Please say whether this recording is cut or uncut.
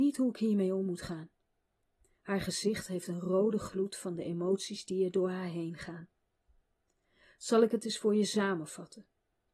uncut